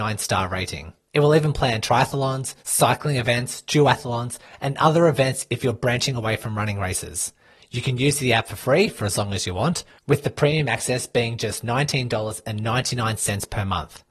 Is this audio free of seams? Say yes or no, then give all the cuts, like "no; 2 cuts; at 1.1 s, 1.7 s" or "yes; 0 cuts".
yes; 0 cuts